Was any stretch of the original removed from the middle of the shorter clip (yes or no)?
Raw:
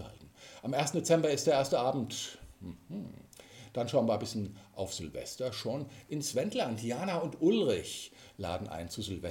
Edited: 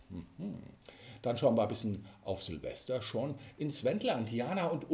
no